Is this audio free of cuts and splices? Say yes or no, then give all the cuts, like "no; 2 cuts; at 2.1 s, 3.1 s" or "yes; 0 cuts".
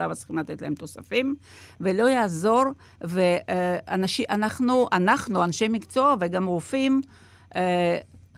yes; 0 cuts